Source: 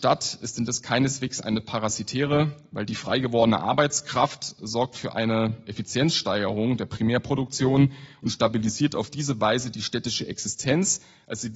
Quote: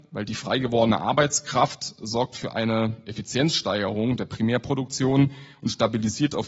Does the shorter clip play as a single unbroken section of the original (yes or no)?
yes